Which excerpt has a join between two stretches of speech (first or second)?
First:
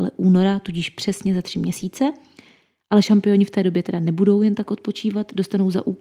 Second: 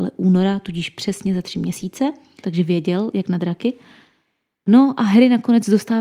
second